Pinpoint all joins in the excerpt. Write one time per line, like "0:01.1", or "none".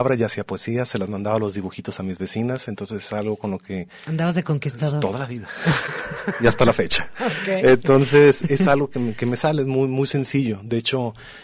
none